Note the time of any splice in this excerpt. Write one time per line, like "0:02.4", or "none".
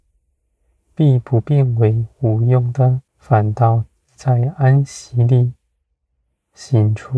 0:03.1

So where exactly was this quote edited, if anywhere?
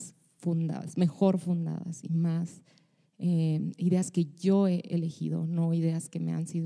none

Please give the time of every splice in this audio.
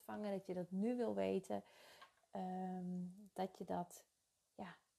none

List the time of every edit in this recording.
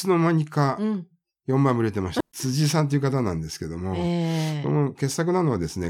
0:02.2

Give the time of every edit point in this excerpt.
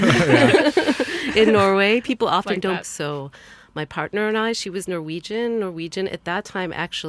0:02.8

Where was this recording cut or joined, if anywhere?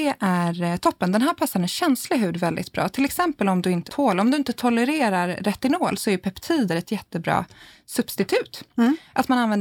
0:03.9

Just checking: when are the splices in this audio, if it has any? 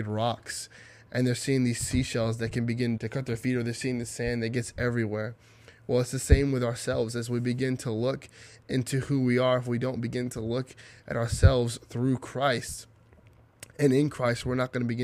0:03.0

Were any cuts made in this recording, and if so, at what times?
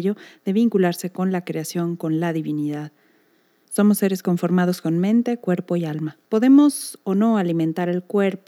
0:03.6
0:06.2

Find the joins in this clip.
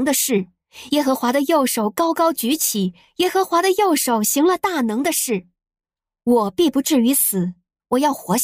none

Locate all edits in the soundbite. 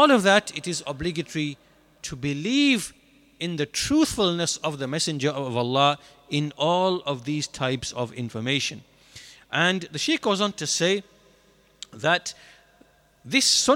none

